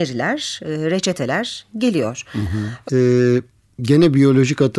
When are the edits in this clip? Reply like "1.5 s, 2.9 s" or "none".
2.8 s